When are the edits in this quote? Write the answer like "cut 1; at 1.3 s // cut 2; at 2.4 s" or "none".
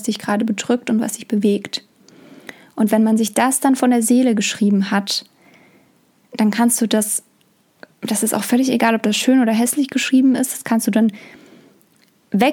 none

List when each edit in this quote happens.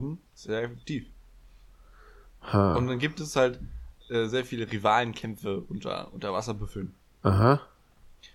none

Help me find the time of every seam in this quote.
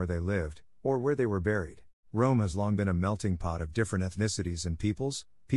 cut 1; at 2.0 s

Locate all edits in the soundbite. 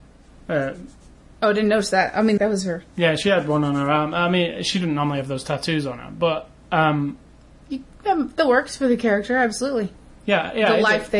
cut 1; at 2.4 s

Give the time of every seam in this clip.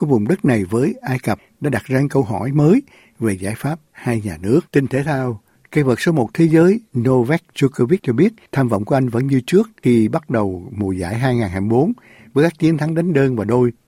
cut 1; at 4.7 s

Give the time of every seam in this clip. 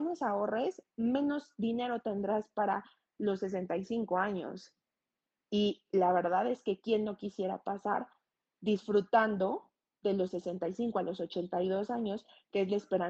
none

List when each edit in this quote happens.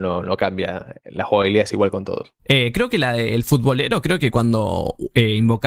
cut 1; at 2.4 s

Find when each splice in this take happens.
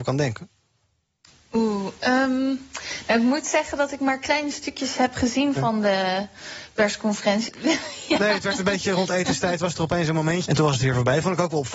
cut 1; at 7.5 s // cut 2; at 10.5 s

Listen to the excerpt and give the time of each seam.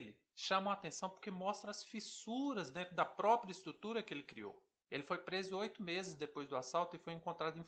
cut 1; at 4.8 s

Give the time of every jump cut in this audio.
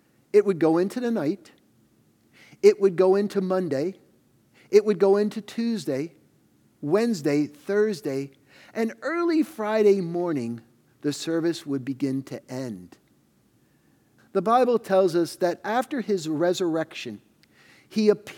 cut 1; at 14.2 s

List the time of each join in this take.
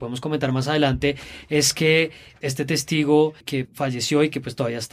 cut 1; at 2.4 s // cut 2; at 3.6 s

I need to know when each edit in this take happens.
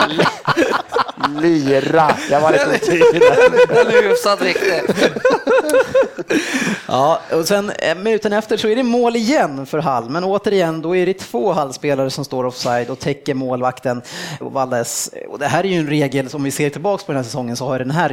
cut 1; at 14.4 s

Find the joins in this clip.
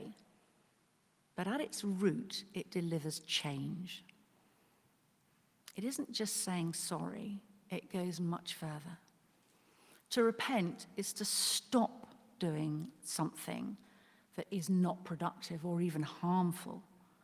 none

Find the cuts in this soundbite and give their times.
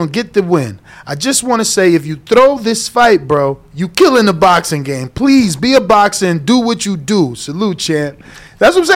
none

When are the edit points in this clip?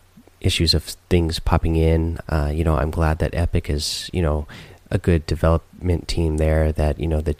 cut 1; at 2.2 s

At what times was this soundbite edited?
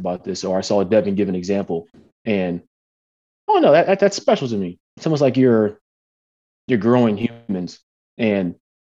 cut 1; at 2.1 s // cut 2; at 4.9 s

